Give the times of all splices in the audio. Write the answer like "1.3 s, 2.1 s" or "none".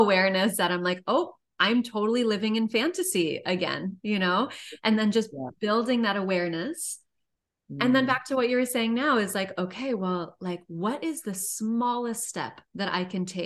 none